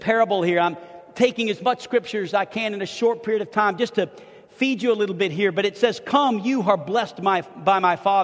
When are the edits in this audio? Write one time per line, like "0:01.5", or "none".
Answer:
none